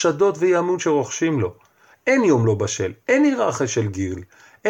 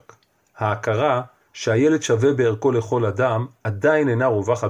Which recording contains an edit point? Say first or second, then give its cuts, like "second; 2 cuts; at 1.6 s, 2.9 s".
first; 1 cut; at 1.9 s